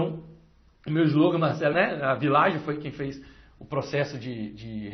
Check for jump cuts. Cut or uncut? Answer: cut